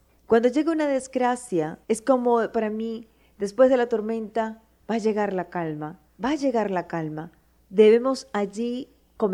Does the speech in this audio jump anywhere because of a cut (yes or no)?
yes